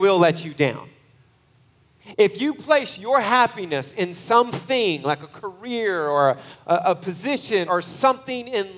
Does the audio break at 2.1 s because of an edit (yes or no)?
no